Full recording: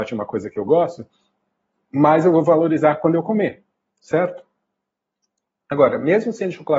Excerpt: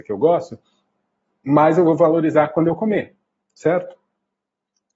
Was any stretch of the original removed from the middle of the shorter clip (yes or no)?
no